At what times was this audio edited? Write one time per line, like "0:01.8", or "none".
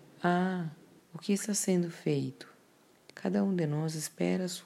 0:01.0
0:03.1